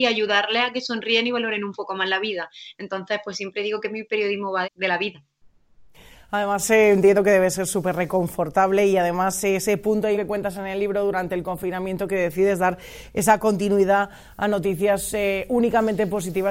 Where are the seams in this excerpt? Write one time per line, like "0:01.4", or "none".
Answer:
0:04.6
0:10.1